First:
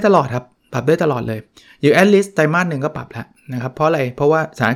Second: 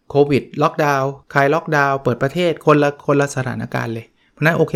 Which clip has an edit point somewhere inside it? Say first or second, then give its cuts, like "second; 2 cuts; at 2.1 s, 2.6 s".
second; 1 cut; at 1.2 s